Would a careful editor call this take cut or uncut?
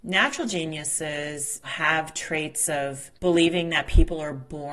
cut